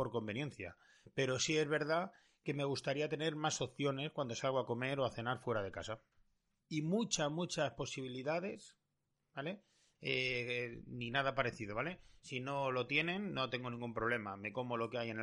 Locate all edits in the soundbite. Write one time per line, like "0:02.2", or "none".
0:06.6
0:09.9